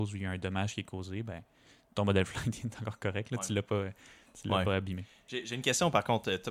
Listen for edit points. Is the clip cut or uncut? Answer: uncut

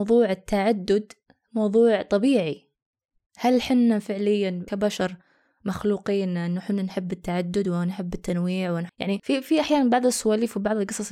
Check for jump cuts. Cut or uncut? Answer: uncut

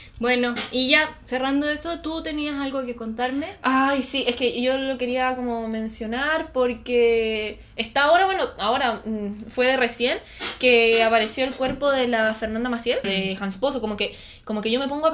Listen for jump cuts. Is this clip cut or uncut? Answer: cut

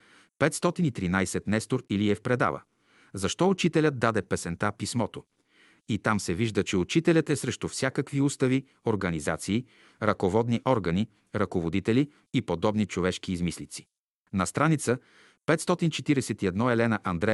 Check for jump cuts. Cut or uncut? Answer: uncut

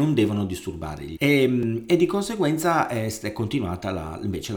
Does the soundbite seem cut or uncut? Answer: cut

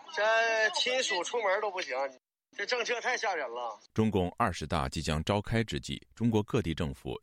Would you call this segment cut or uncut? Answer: cut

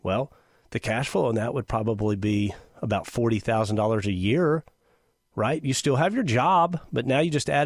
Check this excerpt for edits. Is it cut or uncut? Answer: uncut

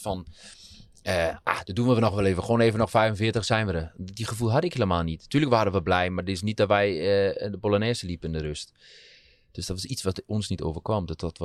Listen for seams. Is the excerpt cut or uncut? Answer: uncut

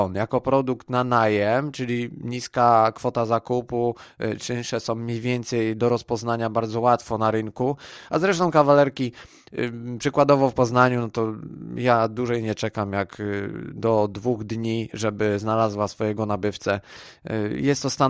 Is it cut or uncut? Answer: uncut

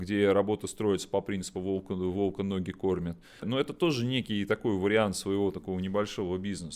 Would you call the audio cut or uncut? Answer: uncut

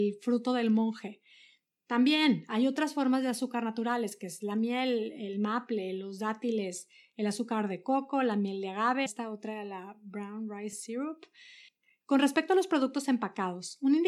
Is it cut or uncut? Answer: cut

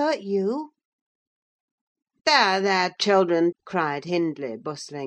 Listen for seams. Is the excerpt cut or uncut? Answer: cut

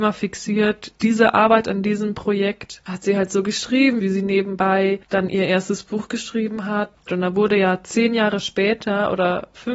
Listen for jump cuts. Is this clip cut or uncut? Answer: cut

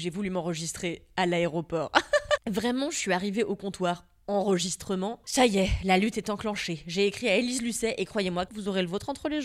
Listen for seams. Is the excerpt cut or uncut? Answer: cut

